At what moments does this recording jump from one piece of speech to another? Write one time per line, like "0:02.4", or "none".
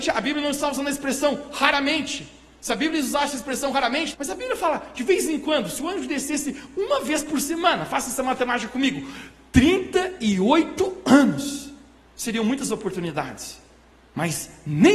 0:04.1